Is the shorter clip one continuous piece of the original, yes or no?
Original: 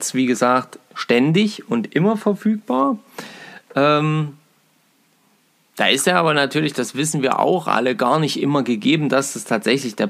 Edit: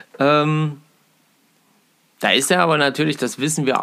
yes